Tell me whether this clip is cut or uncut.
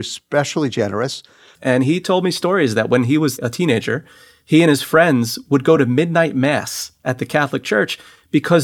cut